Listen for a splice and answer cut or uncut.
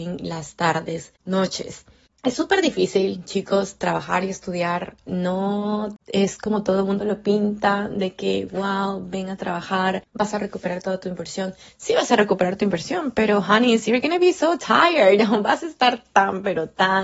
uncut